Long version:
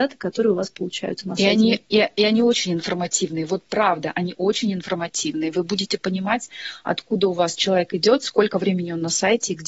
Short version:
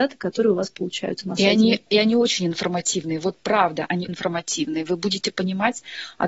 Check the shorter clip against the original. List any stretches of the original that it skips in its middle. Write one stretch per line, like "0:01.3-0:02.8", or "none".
0:01.9-0:02.1
0:04.3-0:04.8